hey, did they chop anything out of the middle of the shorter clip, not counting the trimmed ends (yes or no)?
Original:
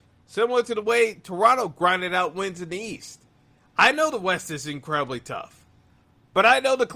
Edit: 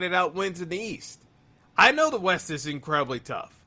no